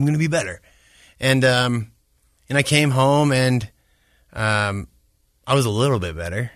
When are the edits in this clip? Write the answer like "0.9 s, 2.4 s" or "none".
none